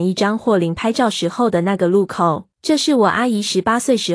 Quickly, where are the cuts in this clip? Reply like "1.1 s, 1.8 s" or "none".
2.5 s